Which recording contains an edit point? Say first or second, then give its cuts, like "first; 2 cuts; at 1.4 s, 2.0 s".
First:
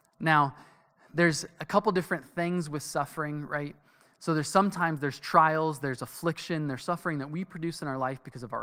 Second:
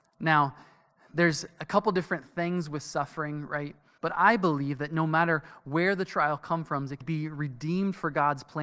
second; 2 cuts; at 4.0 s, 7.0 s